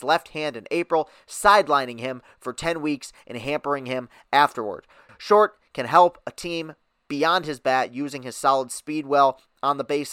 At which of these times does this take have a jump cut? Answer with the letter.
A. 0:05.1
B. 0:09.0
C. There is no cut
A